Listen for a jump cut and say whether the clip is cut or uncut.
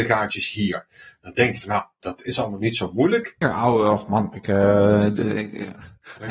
cut